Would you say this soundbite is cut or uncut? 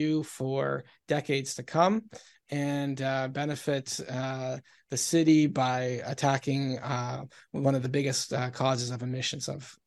uncut